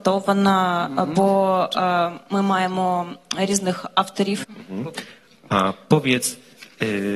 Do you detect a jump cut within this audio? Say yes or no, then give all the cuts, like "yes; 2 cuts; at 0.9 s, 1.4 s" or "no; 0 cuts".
yes; 1 cut; at 4.4 s